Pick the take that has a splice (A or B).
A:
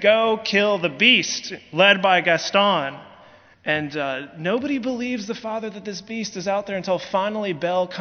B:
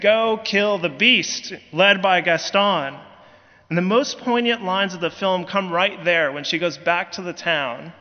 A